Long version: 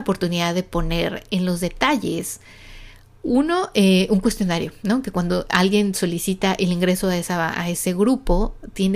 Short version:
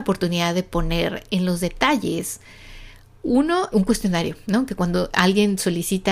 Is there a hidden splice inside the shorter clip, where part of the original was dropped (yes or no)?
yes